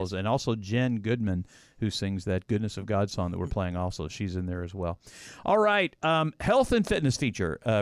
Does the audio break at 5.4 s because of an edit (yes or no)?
no